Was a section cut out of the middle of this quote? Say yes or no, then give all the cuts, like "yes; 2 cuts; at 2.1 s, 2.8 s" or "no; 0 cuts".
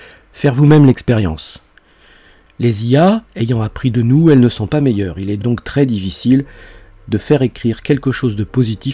no; 0 cuts